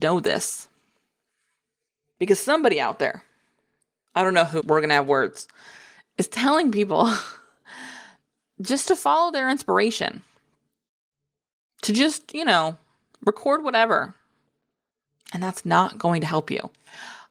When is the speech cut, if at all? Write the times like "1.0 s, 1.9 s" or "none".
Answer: 4.6 s